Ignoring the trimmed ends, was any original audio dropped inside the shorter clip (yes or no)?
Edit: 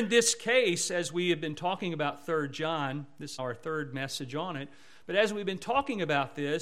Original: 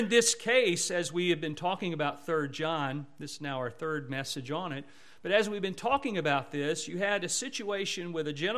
yes